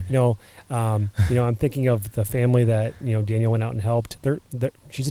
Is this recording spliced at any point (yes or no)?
no